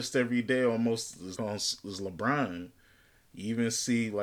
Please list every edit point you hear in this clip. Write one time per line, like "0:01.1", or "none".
0:01.4